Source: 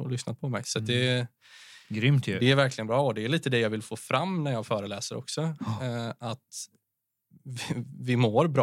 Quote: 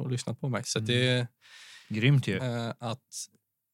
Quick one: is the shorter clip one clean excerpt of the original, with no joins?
no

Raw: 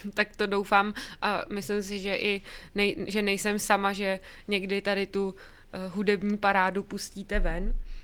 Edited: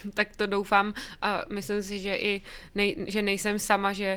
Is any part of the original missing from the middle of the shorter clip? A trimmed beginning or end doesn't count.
no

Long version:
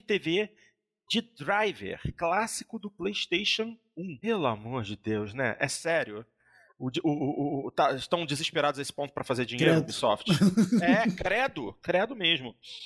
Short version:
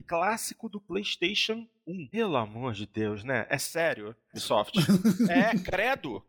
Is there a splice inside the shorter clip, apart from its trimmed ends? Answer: yes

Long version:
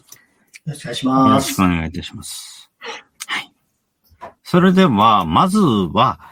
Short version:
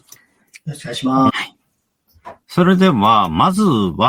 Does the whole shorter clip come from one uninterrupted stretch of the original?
no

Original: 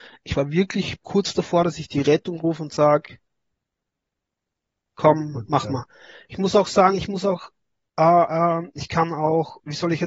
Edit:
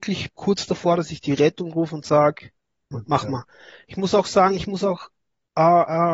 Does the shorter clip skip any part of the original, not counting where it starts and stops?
yes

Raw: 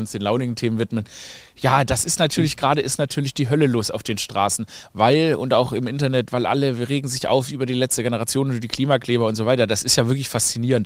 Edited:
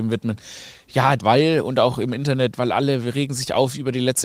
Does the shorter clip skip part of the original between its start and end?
yes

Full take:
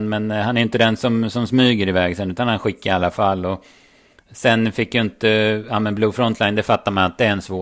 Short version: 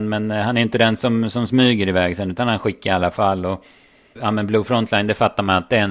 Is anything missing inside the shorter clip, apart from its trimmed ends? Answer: yes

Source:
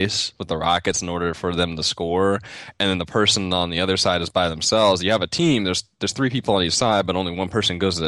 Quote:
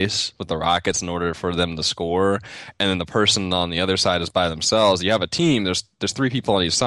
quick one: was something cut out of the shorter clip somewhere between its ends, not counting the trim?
no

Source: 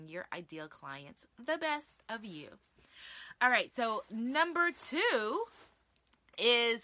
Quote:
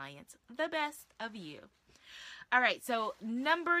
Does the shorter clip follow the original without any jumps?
yes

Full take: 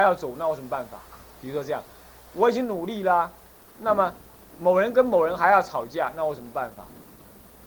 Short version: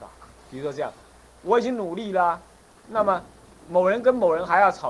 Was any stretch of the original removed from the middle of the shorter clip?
no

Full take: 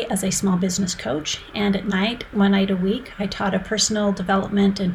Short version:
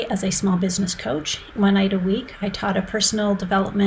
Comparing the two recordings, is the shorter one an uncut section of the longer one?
no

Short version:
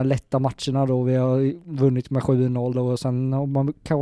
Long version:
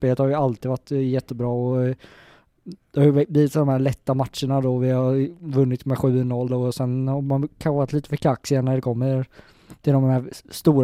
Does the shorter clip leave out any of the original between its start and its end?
no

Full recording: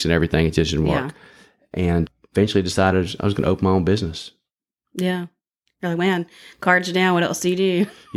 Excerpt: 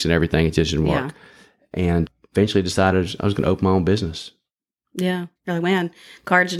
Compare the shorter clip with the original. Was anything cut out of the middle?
yes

